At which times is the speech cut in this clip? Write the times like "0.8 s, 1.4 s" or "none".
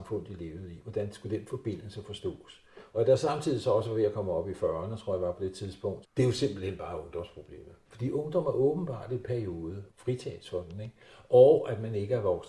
6.0 s, 7.9 s, 9.9 s